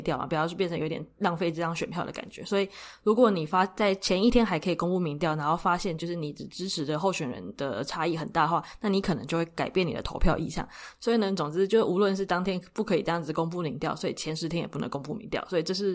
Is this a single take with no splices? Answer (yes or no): no